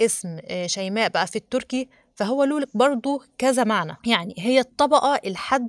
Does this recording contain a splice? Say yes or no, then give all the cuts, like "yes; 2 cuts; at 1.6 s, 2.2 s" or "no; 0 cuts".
yes; 1 cut; at 4.0 s